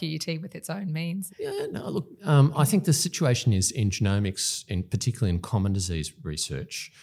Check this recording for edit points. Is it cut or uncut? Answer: cut